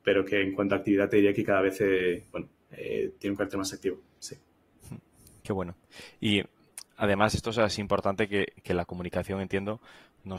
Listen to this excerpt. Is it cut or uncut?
uncut